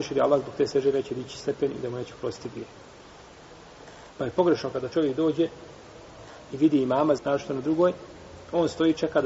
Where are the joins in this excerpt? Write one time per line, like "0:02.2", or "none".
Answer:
0:04.1
0:07.2